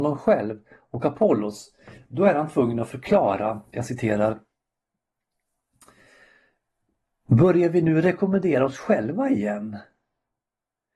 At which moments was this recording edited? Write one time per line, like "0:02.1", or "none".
none